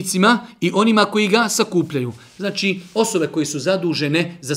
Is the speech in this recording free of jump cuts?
yes; 0 cuts

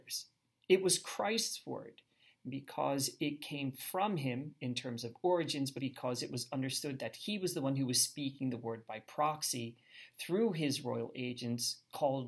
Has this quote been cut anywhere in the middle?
yes; 1 cut; at 5.8 s

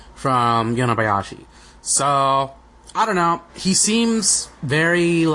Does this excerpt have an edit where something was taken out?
yes; 1 cut; at 3.5 s

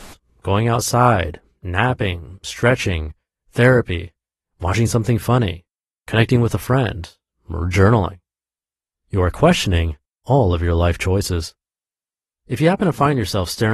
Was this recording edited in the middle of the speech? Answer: no; 0 cuts

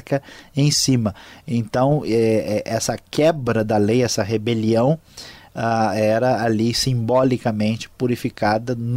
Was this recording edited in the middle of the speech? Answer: no; 0 cuts

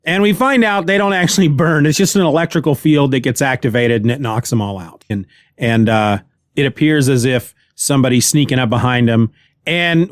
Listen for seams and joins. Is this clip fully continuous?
no; 1 cut; at 5.1 s

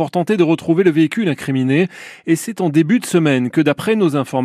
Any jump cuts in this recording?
no; 0 cuts

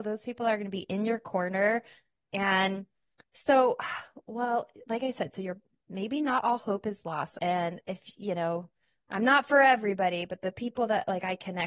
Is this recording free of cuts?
no; 1 cut; at 7.4 s

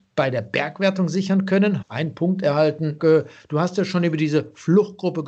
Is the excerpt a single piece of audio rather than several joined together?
no; 2 cuts; at 1.8 s, 3.0 s

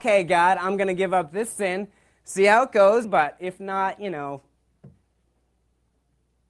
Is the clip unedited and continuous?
no; 1 cut; at 3.0 s

